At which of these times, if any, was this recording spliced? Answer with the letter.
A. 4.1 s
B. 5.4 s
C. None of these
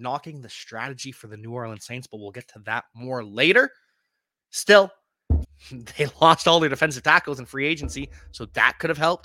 B